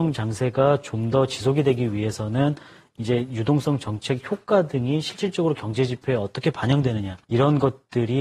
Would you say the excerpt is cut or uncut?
cut